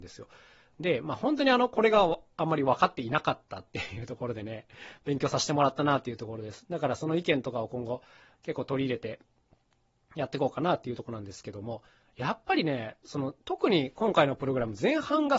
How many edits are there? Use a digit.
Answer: 0